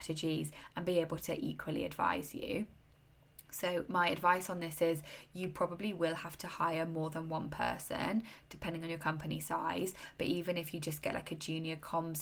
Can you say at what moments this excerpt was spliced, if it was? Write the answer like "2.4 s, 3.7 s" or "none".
none